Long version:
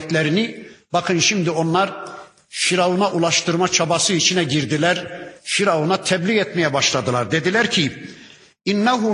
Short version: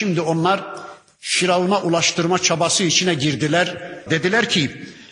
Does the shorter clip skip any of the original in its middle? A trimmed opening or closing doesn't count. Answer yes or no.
yes